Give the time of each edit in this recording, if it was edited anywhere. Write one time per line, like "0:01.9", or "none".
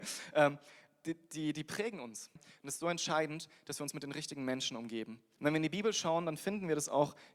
0:02.4
0:05.4